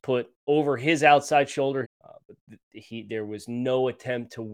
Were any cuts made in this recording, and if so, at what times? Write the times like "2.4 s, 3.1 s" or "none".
1.8 s